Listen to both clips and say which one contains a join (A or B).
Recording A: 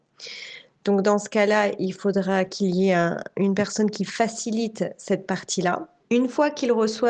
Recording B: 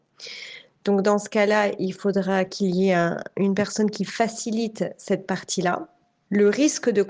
A